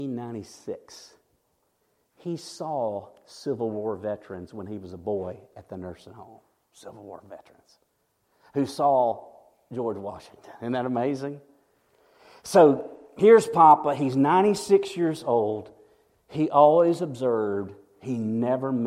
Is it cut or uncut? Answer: uncut